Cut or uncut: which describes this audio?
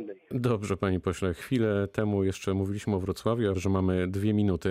cut